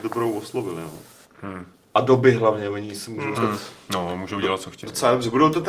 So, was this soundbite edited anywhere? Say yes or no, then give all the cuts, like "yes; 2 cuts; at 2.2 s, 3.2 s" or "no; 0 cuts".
yes; 2 cuts; at 1.2 s, 3.3 s